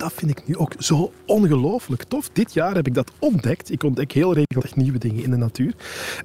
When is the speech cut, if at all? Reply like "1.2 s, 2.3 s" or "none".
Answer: none